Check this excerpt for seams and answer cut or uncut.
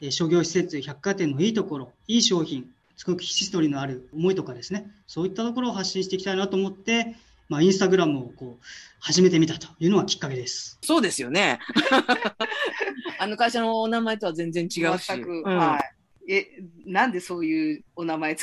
cut